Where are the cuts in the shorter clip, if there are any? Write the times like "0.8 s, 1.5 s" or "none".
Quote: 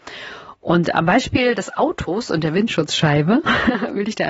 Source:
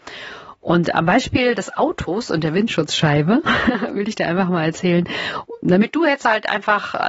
none